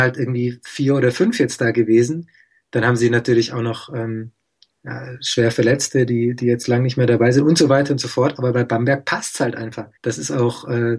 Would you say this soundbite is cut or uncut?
cut